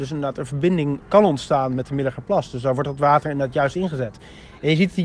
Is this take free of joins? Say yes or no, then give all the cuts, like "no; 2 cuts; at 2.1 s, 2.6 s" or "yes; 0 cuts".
yes; 0 cuts